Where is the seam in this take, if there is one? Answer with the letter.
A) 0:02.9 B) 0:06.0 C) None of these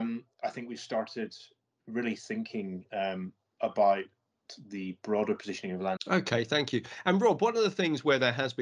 B